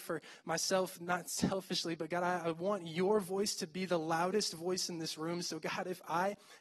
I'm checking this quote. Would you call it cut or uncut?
uncut